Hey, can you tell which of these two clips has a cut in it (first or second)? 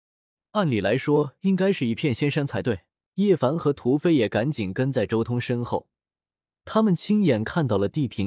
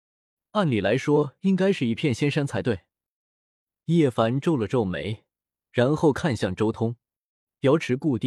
first